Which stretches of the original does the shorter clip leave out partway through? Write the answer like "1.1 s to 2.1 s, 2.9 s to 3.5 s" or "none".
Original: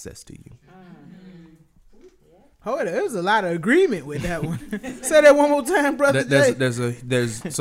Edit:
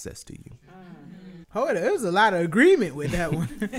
1.4 s to 2.5 s

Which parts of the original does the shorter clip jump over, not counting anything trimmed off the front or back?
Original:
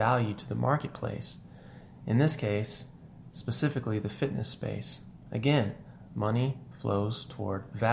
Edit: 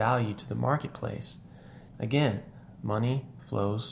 1.9 s to 5.2 s

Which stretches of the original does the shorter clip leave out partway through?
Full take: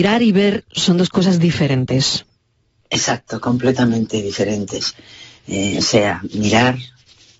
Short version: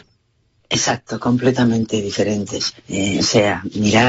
5.0 s to 5.4 s

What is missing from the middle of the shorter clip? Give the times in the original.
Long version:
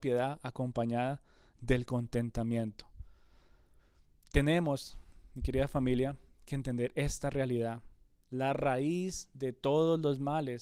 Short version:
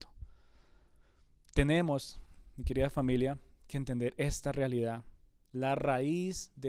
none

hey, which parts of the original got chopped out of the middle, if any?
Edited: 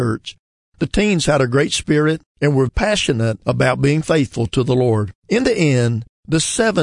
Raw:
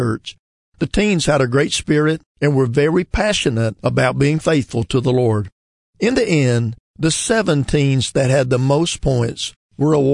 2.7 s to 3.1 s, 5.5 s to 5.9 s

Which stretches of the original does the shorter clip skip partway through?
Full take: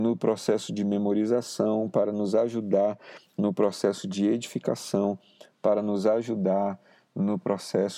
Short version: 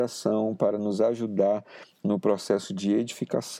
none

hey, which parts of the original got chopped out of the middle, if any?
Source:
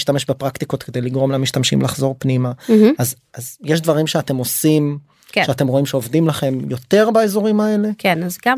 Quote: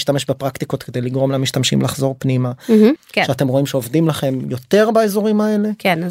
3.0 s to 5.2 s

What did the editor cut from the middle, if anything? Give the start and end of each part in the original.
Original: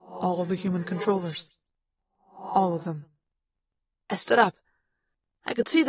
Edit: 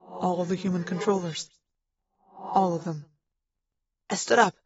none

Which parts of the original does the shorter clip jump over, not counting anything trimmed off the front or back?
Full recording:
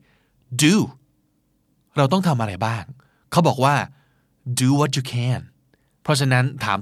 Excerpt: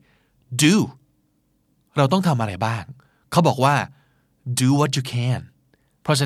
none

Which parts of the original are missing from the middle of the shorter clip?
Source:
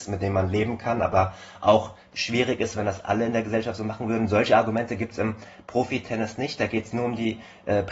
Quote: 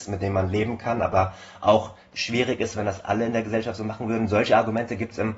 none

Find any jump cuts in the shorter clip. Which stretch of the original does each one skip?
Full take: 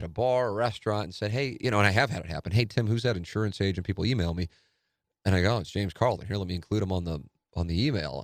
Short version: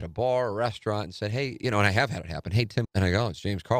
2.8 s to 5.2 s

